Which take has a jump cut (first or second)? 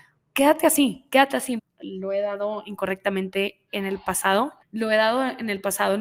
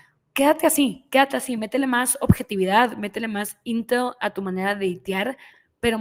first